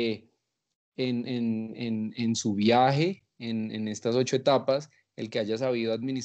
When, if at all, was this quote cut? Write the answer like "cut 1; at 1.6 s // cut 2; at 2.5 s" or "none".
none